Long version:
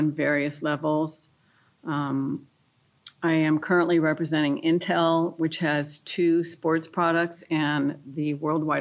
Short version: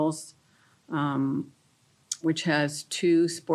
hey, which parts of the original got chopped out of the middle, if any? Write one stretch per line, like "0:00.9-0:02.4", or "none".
0:03.2-0:05.4